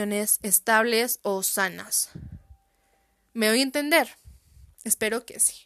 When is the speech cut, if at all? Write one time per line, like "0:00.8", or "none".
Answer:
none

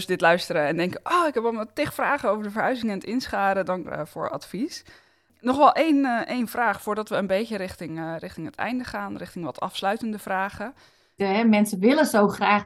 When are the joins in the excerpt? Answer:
0:03.8
0:11.2

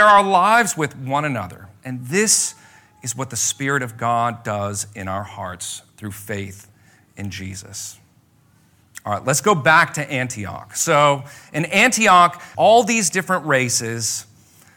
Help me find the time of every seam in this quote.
0:12.5

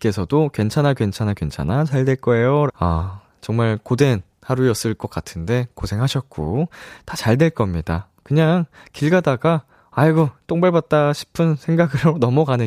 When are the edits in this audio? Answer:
0:02.7

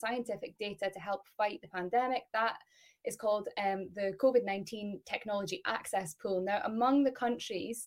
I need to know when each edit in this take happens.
none

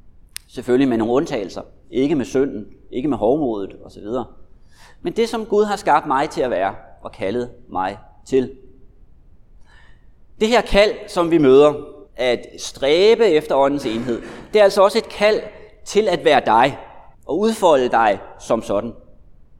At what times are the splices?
0:12.1
0:17.1

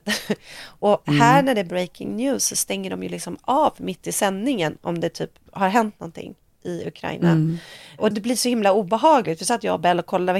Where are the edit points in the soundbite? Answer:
0:08.1

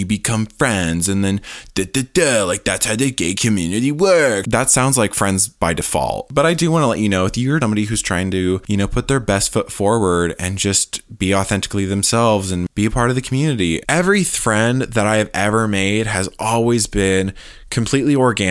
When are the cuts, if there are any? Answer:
0:04.4
0:07.6
0:13.8

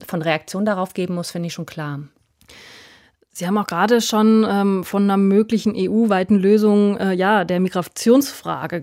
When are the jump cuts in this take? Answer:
none

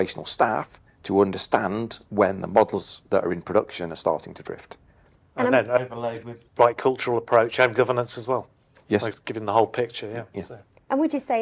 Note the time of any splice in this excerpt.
0:05.2
0:06.5

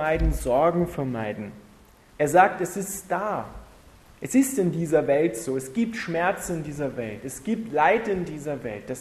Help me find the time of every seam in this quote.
0:02.1

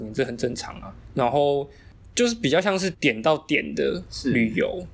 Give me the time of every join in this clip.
0:02.9

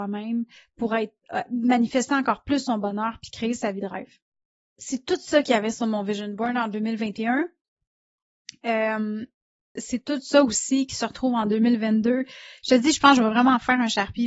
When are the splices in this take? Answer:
0:09.8

